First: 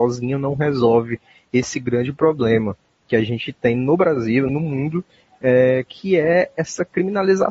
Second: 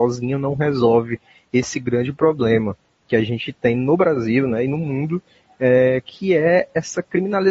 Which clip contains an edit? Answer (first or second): first